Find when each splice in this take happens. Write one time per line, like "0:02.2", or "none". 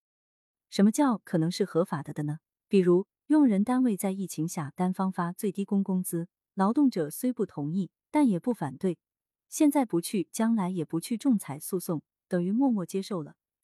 none